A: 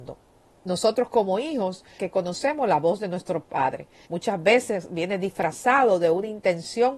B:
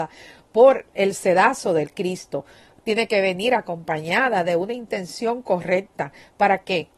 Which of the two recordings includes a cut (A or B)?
A